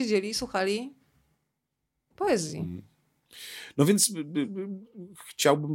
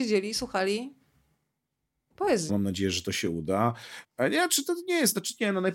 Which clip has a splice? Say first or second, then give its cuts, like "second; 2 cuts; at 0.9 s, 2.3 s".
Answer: second; 2 cuts; at 2.5 s, 4.0 s